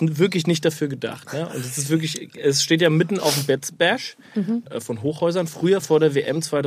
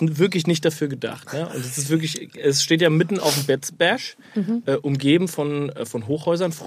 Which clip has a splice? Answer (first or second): first